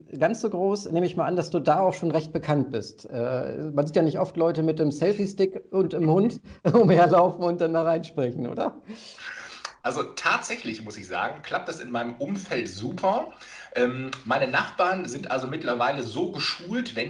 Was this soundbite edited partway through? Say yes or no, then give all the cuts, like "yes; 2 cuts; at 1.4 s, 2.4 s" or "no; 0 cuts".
no; 0 cuts